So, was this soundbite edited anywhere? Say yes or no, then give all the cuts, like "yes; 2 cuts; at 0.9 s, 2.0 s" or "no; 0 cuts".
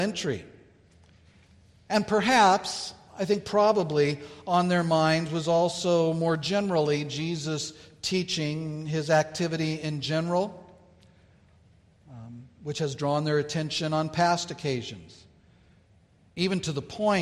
no; 0 cuts